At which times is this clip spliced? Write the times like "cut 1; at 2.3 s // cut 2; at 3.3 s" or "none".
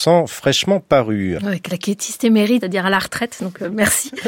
cut 1; at 1.4 s // cut 2; at 2.6 s